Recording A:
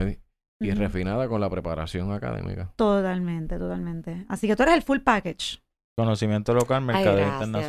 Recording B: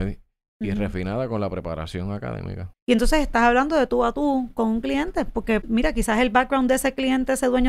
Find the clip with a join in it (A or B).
B